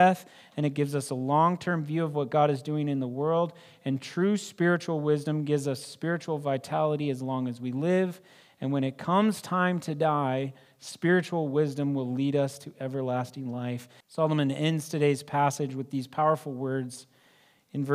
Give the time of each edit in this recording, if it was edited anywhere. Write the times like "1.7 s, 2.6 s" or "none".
14.0 s

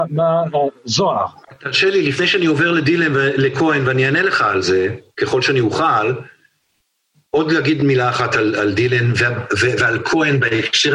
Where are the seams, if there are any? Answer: none

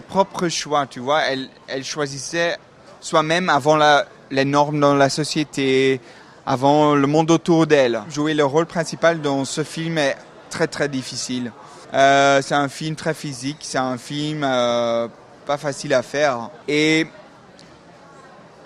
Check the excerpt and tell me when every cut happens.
11.8 s, 16.6 s

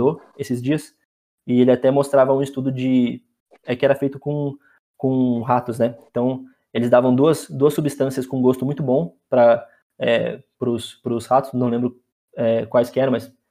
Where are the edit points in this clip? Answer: none

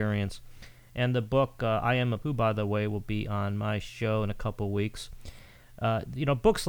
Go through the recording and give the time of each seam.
2.2 s

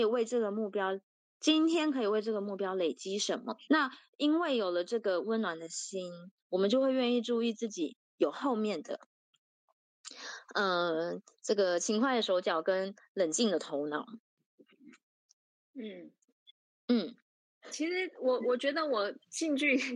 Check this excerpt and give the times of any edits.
3.7 s

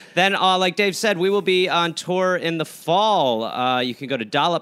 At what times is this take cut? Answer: none

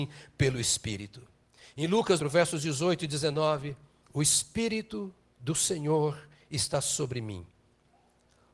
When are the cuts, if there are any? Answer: 2.2 s, 4.0 s

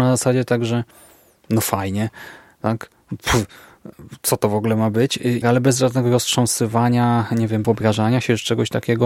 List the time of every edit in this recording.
5.4 s, 7.6 s

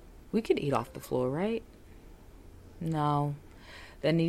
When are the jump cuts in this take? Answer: none

